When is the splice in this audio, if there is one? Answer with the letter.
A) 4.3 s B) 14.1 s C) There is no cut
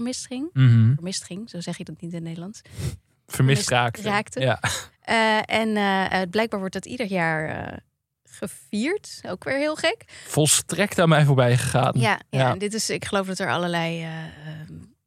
C